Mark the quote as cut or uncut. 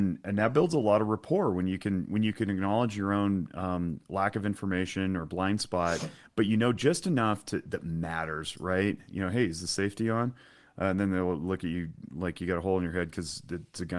uncut